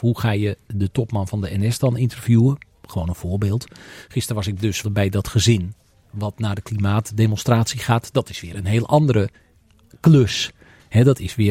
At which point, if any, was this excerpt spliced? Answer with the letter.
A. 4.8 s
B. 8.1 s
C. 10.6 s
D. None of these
A